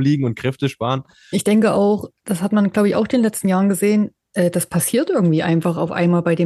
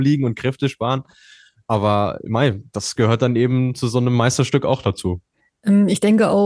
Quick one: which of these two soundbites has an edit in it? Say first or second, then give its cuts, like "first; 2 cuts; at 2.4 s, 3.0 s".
first; 1 cut; at 1.3 s